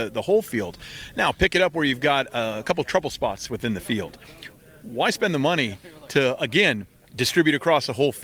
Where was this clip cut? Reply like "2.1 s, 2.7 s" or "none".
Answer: none

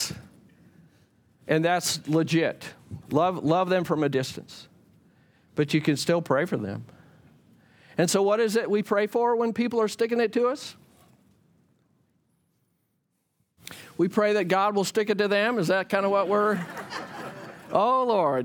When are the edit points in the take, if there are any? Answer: 3.0 s

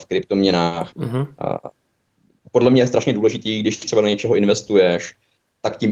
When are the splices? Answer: none

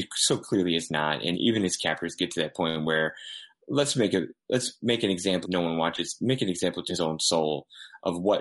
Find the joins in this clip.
1.3 s, 5.4 s, 6.9 s

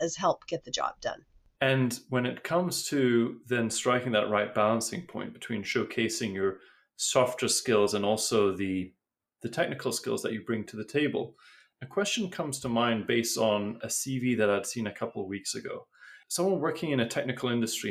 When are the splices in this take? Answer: 1.6 s

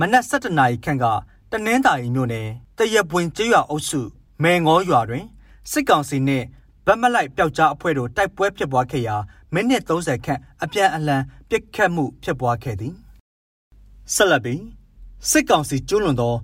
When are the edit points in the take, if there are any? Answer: none

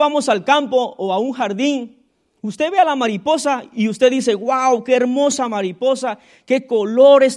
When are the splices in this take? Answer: 2.4 s

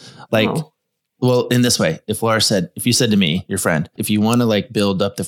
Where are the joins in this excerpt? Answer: 4.0 s

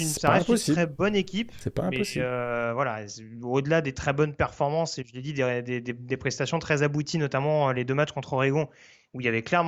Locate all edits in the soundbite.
none

